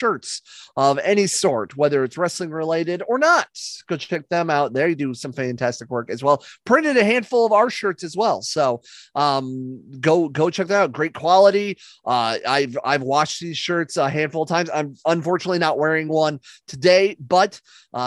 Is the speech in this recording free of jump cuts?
yes; 0 cuts

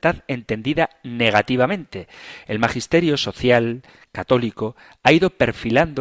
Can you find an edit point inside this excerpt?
yes; 1 cut; at 2.4 s

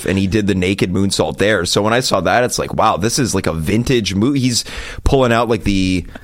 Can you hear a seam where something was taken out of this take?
no; 0 cuts

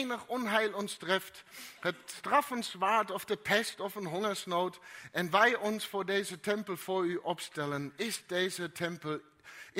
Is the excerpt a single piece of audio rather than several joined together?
yes; 0 cuts

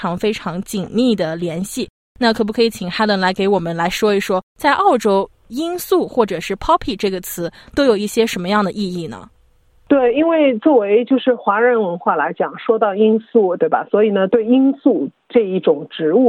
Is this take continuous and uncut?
no; 1 cut; at 13.6 s

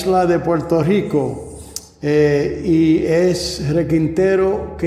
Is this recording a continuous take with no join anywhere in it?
yes; 0 cuts

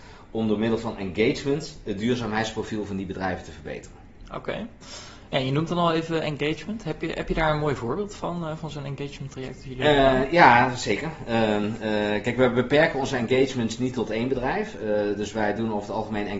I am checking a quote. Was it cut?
no; 0 cuts

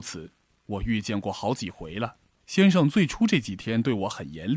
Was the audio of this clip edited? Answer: yes; 1 cut; at 2.4 s

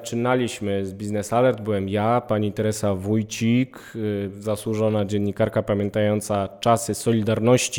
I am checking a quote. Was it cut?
no; 0 cuts

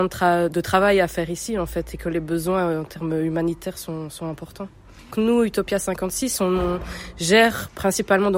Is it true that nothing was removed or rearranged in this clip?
yes; 0 cuts

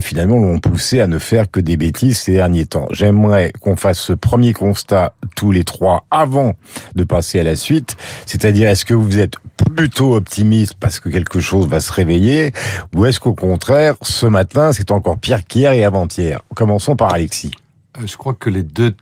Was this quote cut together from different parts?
no; 0 cuts

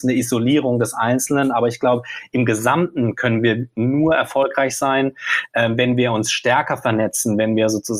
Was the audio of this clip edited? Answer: no; 0 cuts

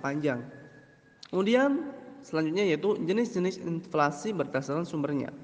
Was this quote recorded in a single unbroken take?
no; 1 cut; at 1.3 s

